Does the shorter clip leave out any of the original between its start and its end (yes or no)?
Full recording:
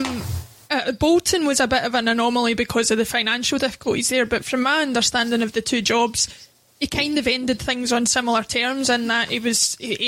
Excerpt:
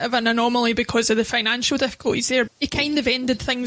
yes